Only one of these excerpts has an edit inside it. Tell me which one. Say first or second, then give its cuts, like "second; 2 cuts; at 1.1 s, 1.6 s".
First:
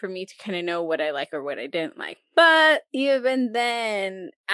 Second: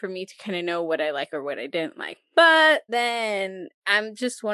second; 1 cut; at 2.9 s